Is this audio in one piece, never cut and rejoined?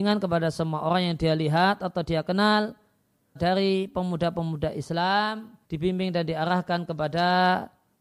no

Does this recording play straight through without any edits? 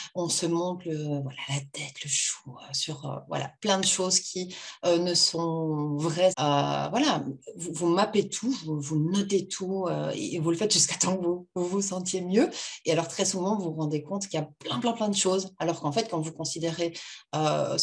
no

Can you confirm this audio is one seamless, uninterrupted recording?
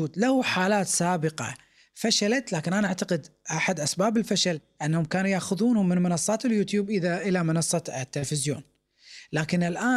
yes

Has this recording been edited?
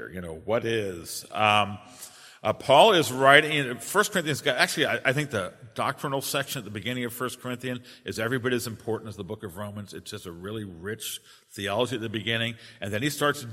no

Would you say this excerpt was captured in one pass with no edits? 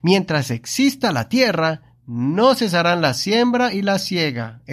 yes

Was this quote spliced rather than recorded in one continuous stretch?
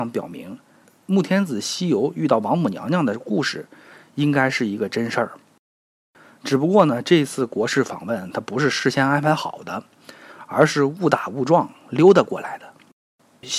no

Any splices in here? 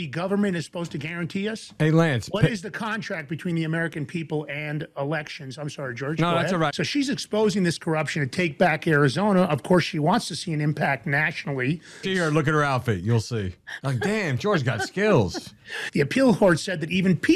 yes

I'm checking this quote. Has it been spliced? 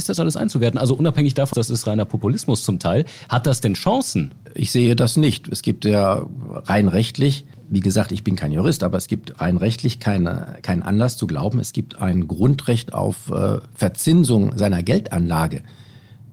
yes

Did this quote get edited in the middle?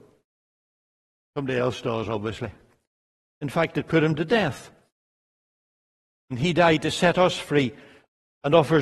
yes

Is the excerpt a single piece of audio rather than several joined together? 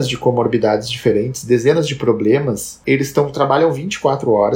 no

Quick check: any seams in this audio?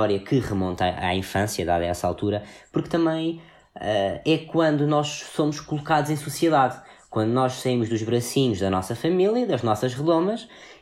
no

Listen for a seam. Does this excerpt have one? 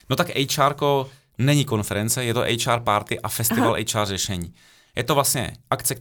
no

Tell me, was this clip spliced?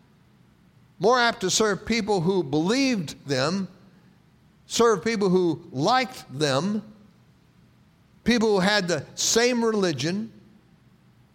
yes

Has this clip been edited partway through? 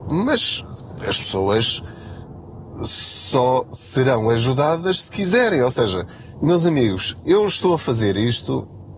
no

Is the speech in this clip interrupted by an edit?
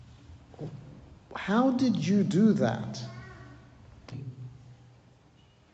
yes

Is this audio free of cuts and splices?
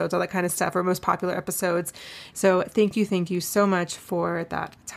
no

